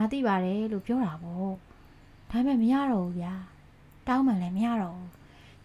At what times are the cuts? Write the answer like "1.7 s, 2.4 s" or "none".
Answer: none